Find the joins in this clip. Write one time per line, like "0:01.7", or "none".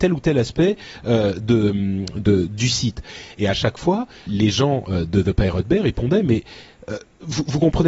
0:04.3